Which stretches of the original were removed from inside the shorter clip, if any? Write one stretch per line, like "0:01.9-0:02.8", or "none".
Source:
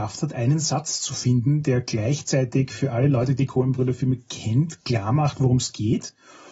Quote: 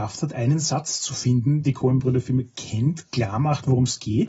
0:01.6-0:03.4